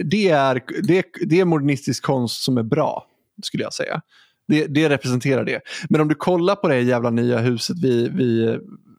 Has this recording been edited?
no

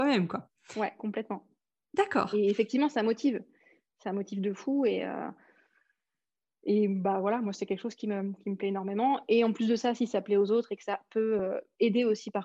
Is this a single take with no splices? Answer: yes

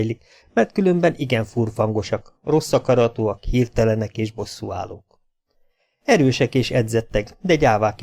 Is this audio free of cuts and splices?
yes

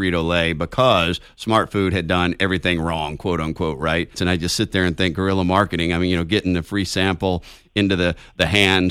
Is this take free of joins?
no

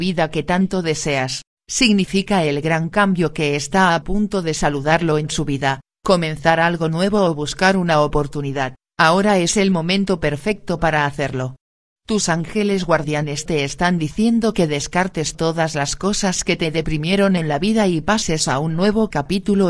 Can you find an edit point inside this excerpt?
yes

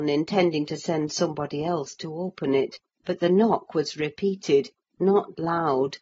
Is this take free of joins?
yes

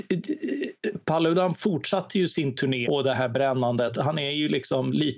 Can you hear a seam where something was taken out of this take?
yes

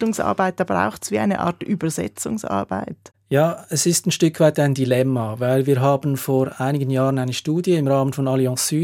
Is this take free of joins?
yes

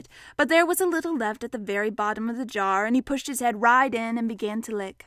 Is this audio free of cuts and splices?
yes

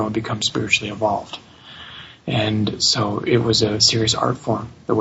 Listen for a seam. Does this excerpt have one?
yes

